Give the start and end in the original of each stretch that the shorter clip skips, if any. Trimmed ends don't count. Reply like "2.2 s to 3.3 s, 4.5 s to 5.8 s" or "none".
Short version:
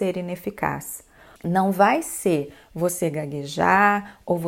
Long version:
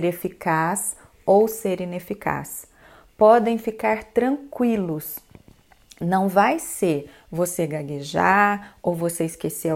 3.0 s to 5.9 s